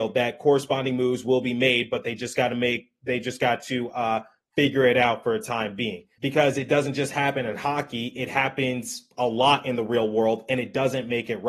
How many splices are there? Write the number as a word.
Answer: one